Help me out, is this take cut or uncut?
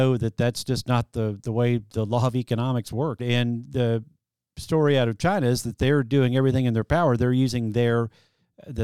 cut